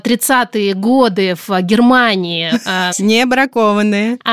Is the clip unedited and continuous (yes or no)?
no